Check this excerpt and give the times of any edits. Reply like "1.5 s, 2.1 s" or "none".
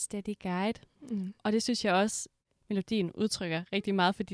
none